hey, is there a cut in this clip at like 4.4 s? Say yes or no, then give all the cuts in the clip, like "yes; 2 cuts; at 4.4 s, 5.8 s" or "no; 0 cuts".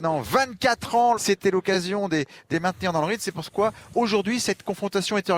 no; 2 cuts; at 1.1 s, 2.5 s